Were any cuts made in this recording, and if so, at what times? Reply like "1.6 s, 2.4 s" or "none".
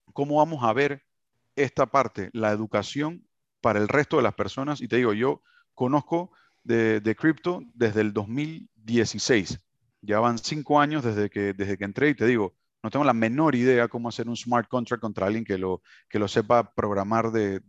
none